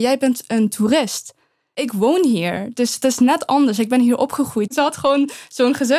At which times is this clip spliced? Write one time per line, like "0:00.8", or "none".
0:04.7